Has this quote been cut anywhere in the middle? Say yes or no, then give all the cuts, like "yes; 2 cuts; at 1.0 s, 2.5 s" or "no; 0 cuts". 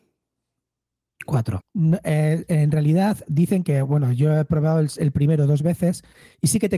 yes; 1 cut; at 1.6 s